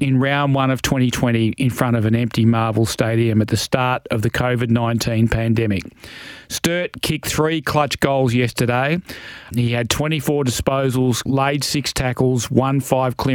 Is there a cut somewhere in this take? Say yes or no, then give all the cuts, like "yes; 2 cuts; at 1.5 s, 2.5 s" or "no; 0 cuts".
yes; 2 cuts; at 9.5 s, 11.3 s